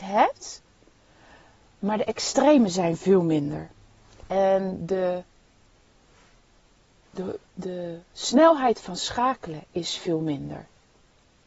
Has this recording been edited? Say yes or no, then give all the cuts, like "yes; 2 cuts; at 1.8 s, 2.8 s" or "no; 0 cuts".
no; 0 cuts